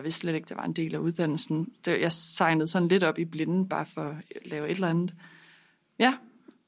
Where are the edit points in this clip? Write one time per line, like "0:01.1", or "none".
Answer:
none